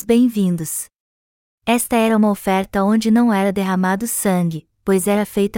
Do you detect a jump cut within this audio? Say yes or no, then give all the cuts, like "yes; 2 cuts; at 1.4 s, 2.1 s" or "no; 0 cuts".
yes; 1 cut; at 1.4 s